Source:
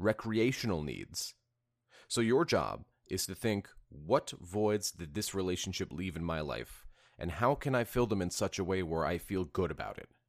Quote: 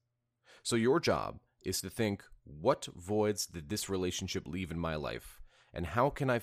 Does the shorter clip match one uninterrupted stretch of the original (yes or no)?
yes